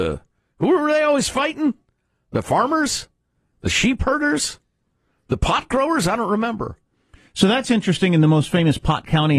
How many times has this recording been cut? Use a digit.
0